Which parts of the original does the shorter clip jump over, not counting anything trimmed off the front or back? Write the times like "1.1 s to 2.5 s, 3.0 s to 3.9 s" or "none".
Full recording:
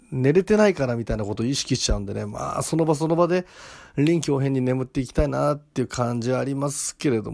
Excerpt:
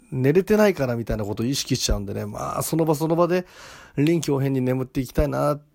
none

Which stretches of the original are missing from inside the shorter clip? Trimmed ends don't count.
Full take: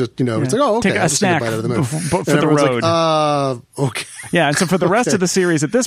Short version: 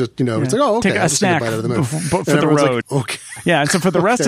2.8 s to 3.7 s

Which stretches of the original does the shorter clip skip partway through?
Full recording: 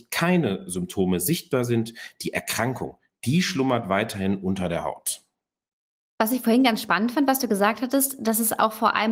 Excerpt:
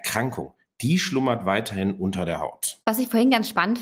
5.2 s to 6.1 s

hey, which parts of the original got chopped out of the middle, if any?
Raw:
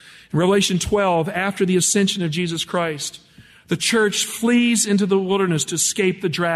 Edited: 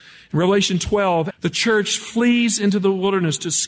1.3 s to 3.6 s

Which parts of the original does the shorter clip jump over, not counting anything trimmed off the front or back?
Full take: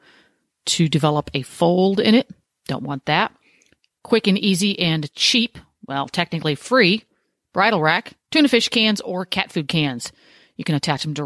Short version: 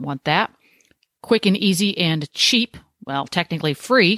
none

